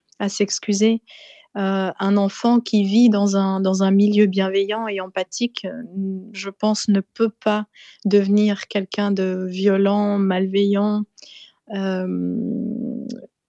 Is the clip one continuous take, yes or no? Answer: yes